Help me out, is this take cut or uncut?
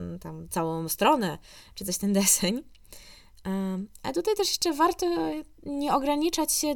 uncut